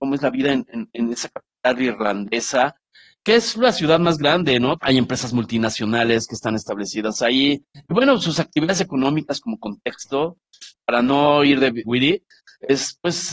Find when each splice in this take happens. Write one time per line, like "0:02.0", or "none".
0:04.8
0:07.7
0:11.8